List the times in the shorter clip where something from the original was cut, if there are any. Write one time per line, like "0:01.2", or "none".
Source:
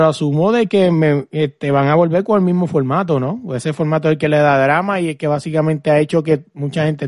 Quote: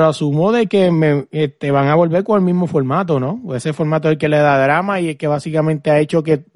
none